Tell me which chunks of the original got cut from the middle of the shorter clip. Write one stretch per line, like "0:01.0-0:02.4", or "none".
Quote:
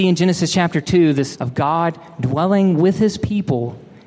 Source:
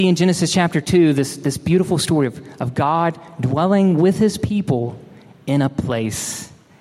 0:01.4-0:02.6